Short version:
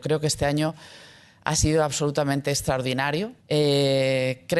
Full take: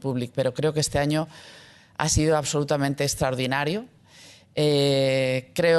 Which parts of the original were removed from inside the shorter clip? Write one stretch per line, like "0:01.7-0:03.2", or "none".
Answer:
0:03.9-0:04.5